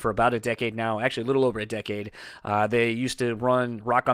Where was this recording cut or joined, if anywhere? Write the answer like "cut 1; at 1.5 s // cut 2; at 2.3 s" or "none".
none